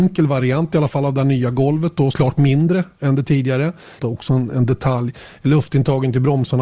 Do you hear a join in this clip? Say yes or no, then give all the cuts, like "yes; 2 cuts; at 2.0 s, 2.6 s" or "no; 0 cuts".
yes; 2 cuts; at 2.1 s, 4.0 s